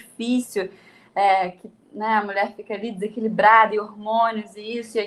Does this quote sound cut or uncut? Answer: uncut